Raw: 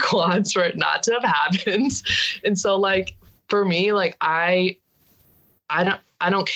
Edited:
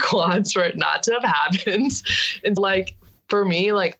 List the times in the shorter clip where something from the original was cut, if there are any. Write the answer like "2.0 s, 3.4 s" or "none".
2.6 s